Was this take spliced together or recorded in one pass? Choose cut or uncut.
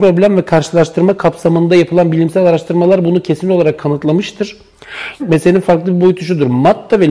cut